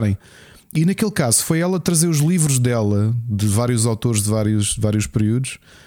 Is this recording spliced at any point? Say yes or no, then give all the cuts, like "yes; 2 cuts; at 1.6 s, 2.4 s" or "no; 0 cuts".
no; 0 cuts